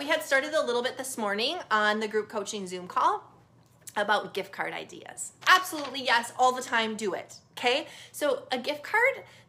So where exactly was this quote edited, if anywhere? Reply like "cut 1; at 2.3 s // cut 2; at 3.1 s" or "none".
cut 1; at 5.4 s